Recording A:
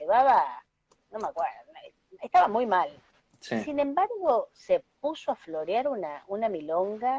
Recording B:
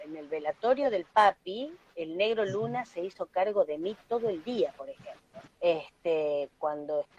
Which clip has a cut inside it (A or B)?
B